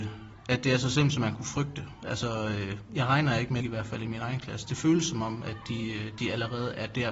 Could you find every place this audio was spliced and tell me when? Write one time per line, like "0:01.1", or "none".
0:03.6

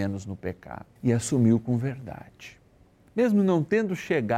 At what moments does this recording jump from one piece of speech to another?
0:01.0
0:03.1

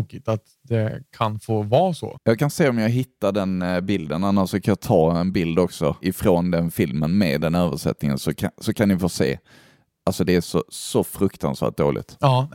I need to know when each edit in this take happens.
0:02.2

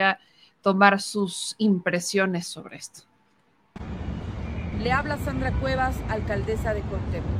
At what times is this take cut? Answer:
0:04.7

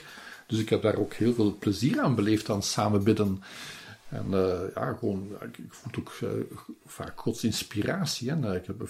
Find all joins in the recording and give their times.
none

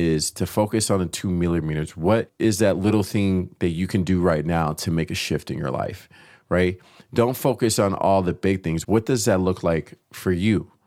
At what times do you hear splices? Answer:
0:08.8

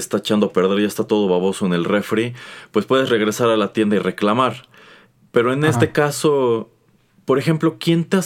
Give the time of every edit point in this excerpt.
none

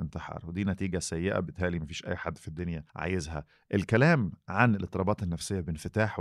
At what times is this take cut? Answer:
0:02.9

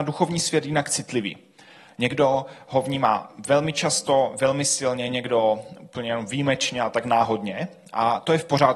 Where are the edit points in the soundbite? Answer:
none

